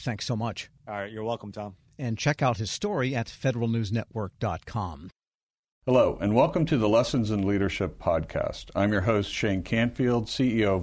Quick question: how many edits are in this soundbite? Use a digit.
0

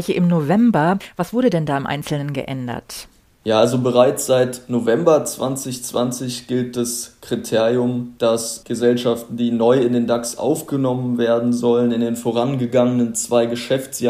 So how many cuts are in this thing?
0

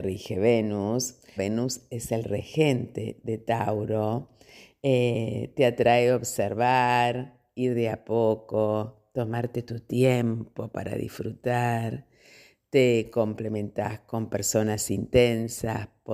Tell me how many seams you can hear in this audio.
1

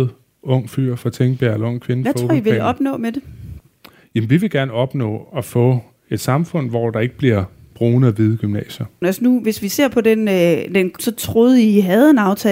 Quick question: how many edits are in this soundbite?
2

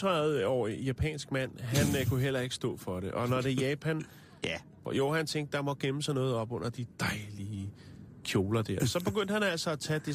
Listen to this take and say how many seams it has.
2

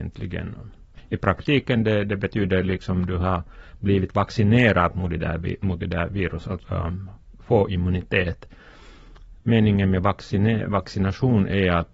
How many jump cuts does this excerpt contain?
1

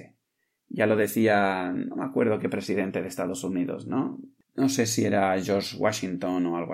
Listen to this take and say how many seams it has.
0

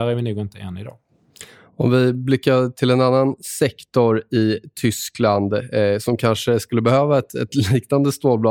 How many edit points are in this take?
0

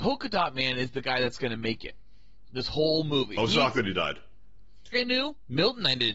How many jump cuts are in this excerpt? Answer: 2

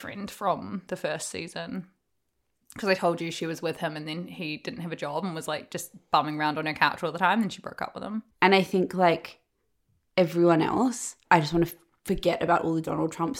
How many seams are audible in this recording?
2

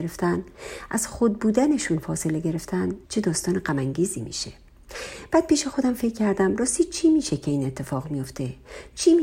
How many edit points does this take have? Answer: 1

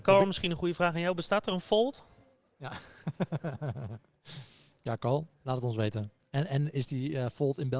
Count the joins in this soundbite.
0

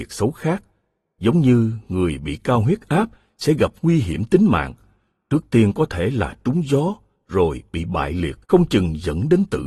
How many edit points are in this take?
1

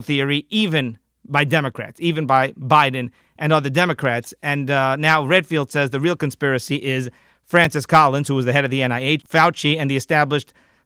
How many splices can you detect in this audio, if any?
1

